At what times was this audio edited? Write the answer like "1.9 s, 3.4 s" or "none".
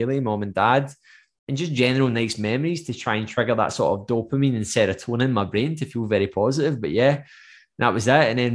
none